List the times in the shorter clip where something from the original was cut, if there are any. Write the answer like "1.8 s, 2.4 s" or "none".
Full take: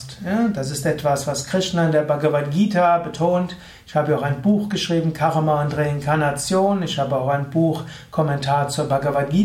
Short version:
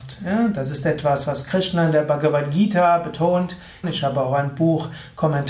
3.8 s